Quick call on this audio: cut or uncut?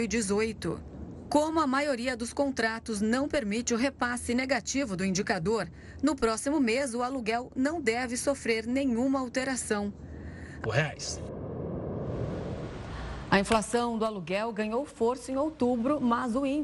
cut